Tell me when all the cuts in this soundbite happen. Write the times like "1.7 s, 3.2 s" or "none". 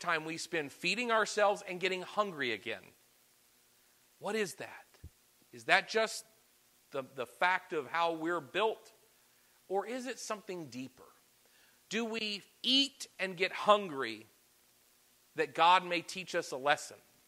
none

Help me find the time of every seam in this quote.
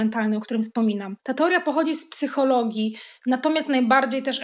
none

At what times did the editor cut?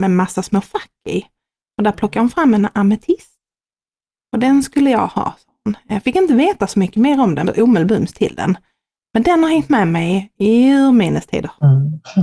7.4 s, 9.0 s

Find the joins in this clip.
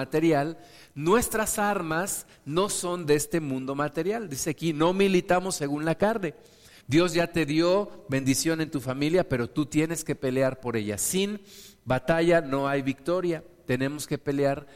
6.8 s

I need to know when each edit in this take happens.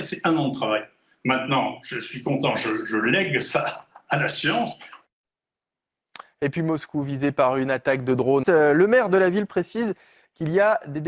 8.4 s

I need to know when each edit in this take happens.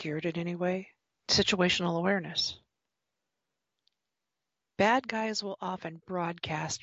1.2 s

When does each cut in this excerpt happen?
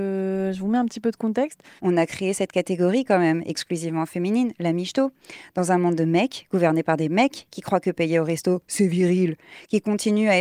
1.8 s

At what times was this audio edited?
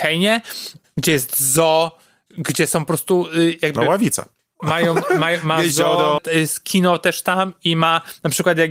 4.6 s, 6.2 s

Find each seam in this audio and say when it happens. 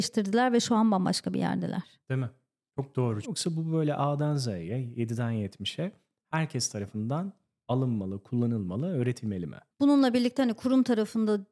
3.2 s, 9.7 s

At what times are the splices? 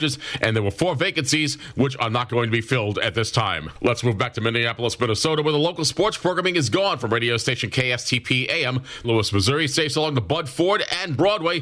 9.0 s

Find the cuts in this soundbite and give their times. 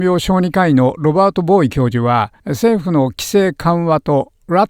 2.4 s

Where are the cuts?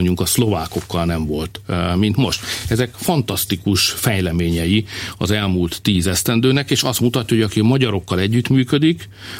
none

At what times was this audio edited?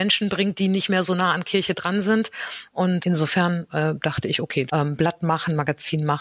3.0 s, 4.7 s

